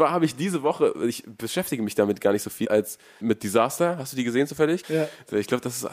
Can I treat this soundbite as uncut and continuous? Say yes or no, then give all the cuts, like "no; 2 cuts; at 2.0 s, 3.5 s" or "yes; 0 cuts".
no; 2 cuts; at 2.6 s, 4.8 s